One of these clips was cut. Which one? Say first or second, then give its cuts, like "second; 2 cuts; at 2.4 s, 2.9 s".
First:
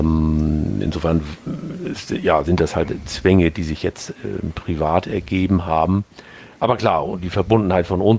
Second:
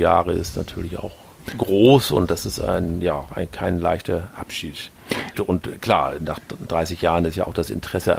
second; 1 cut; at 5.3 s